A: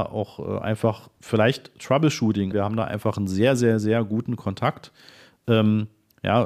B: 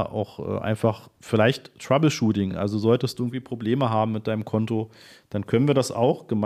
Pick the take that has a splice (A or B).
A